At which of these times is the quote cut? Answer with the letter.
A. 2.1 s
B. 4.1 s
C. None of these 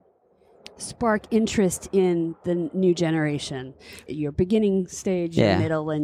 B